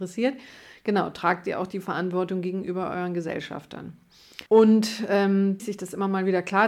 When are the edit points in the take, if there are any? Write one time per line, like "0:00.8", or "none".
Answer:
0:04.5
0:05.6